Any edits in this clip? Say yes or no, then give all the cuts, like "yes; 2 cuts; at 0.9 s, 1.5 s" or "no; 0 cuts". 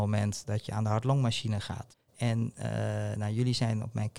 yes; 1 cut; at 2.1 s